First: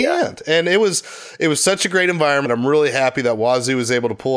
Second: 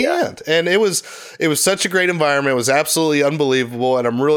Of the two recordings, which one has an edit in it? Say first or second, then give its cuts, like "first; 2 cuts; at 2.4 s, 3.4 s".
first; 1 cut; at 2.5 s